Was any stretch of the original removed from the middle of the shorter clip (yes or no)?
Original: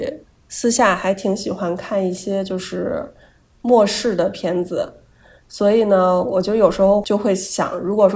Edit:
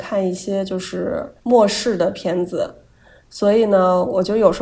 yes